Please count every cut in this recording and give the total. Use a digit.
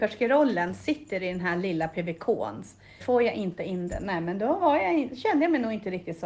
1